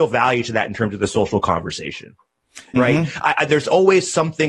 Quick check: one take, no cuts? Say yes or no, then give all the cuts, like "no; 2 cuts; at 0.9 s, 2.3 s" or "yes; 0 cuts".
no; 1 cut; at 2.7 s